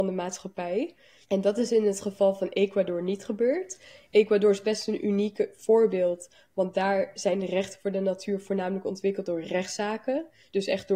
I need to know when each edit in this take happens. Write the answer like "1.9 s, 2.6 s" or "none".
1.2 s